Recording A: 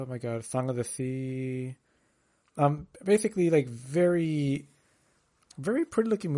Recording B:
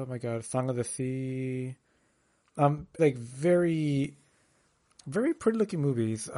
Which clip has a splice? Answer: B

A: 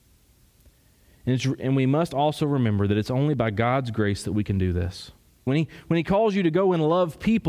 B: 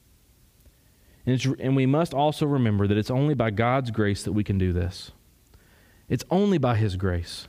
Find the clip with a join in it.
A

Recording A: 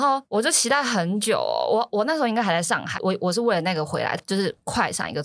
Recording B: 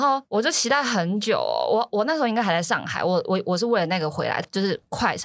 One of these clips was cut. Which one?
A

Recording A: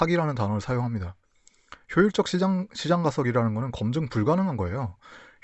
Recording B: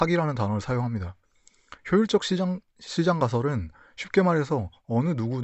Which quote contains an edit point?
B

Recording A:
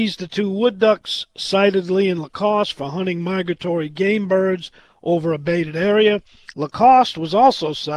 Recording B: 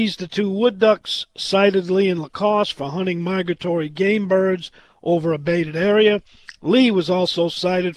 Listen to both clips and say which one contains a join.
A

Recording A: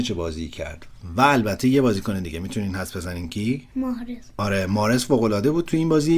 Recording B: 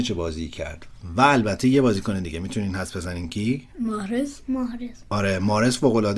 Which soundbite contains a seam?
A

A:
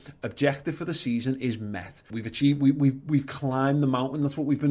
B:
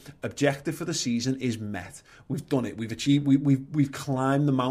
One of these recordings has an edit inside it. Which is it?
A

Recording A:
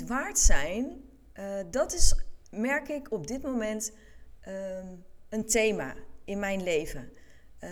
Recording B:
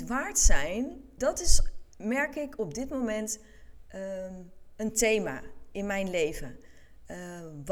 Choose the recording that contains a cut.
B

